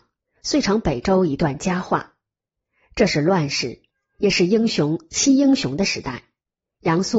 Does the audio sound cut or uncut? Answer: uncut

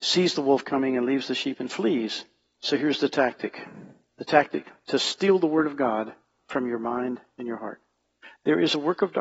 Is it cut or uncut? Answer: cut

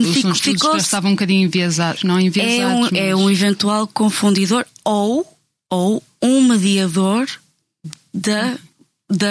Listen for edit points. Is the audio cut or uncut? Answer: cut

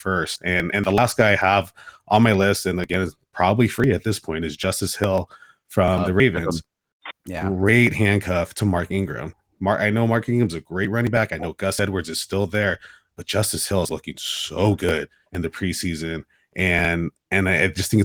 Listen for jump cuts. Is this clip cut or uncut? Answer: cut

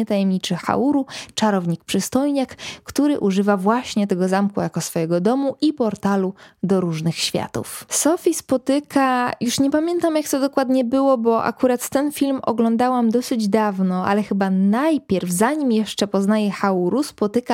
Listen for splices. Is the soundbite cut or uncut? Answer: uncut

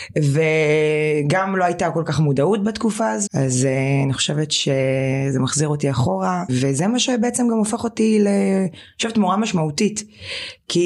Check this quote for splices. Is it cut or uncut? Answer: cut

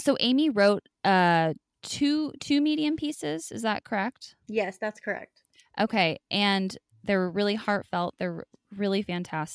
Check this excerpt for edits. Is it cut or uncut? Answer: uncut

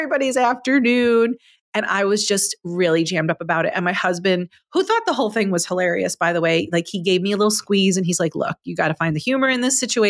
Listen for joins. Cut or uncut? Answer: uncut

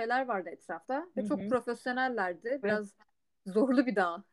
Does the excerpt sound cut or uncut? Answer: cut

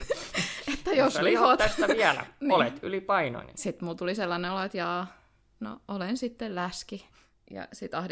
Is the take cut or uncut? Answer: uncut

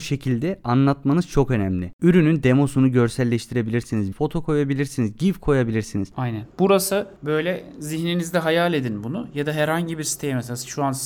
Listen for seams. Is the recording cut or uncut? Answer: cut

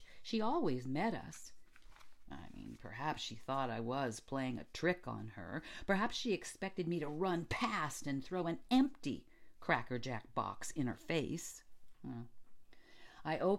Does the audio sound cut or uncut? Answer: uncut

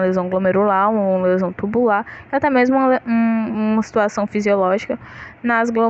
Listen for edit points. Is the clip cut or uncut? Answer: uncut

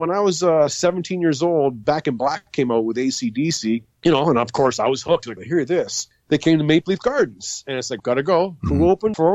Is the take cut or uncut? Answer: cut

